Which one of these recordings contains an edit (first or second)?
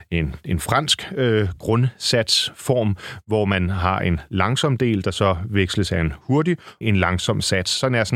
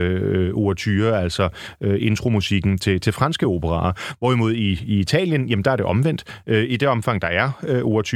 first